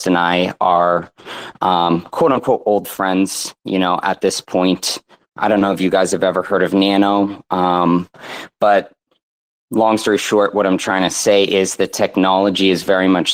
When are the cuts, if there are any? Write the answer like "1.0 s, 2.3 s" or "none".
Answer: 5.2 s

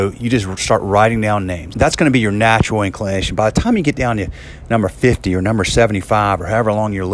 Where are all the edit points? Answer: 1.7 s

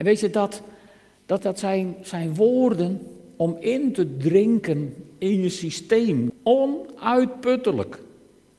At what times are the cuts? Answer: 1.4 s, 6.3 s

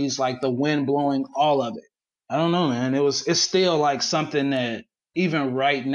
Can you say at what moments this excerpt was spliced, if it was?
none

